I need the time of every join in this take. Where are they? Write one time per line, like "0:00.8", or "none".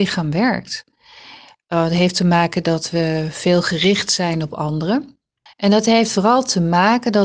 0:05.5